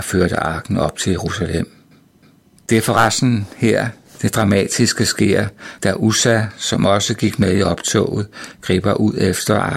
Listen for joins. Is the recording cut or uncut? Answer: uncut